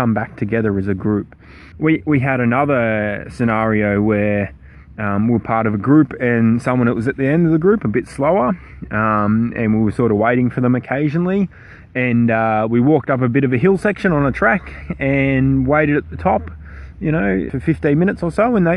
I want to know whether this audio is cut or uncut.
cut